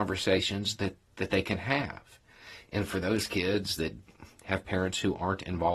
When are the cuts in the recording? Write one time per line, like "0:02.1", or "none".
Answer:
none